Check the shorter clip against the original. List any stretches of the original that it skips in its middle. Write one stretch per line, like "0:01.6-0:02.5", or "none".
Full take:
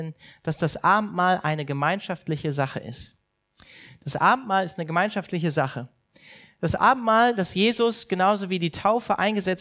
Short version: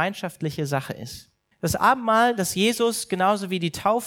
0:03.4-0:06.5